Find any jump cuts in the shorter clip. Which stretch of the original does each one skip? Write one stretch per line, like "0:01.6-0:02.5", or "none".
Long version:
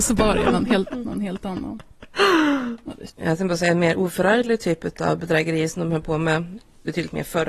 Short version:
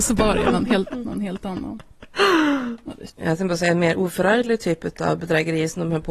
none